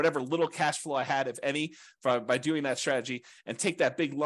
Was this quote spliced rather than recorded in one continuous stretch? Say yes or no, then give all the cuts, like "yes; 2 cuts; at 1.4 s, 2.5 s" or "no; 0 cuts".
no; 0 cuts